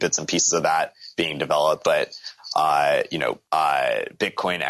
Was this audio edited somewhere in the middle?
yes; 2 cuts; at 1.8 s, 3.4 s

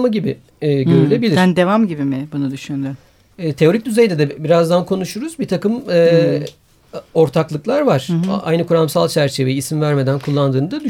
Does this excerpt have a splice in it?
no; 0 cuts

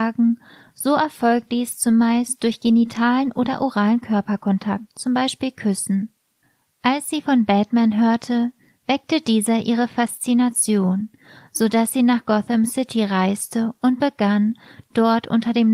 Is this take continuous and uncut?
yes; 0 cuts

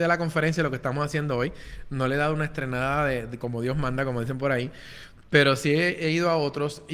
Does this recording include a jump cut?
no; 0 cuts

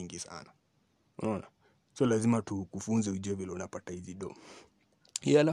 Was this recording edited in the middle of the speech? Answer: no; 0 cuts

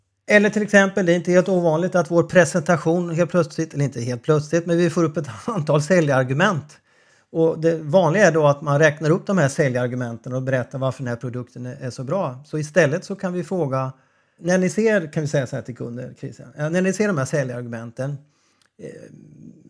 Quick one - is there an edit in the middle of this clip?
yes; 1 cut; at 14.4 s

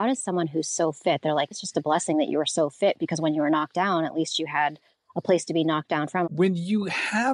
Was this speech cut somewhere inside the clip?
yes; 2 cuts; at 1.5 s, 6.2 s

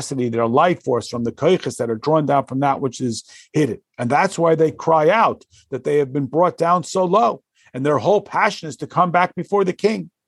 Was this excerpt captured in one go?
yes; 0 cuts

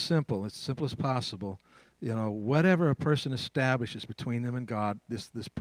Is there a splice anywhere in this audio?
no; 0 cuts

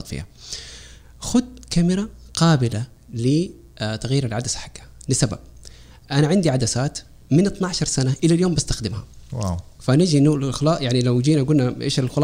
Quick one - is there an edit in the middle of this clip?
yes; 1 cut; at 9.8 s

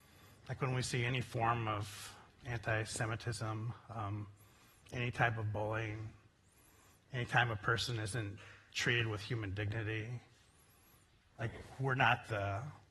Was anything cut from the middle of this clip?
no; 0 cuts

